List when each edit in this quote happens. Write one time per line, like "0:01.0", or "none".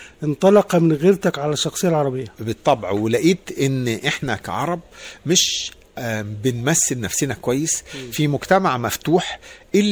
0:02.3